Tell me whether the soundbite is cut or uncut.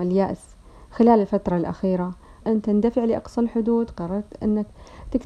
cut